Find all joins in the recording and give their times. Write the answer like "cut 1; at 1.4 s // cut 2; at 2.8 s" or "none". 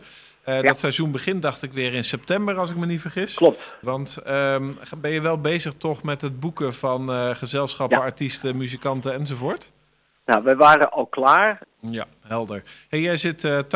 cut 1; at 3.8 s // cut 2; at 11.6 s